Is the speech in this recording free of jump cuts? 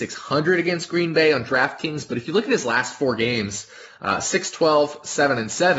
yes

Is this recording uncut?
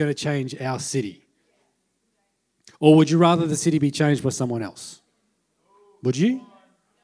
yes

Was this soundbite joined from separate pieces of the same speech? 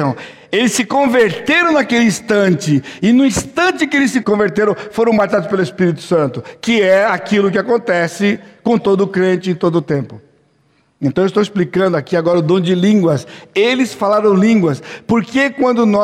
yes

